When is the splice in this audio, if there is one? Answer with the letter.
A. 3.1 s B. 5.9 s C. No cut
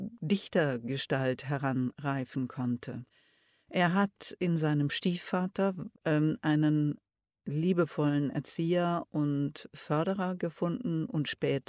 B